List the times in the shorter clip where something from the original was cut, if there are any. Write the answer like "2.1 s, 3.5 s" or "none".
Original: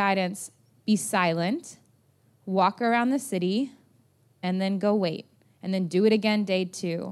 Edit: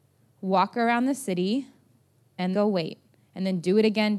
2.5 s